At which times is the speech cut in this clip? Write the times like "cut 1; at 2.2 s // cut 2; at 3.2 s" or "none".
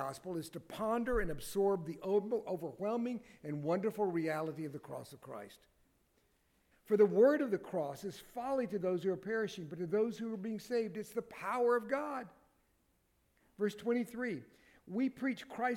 cut 1; at 6.7 s